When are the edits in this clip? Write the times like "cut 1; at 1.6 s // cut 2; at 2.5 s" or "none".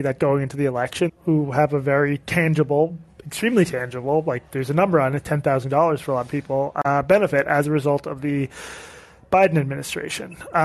cut 1; at 1.1 s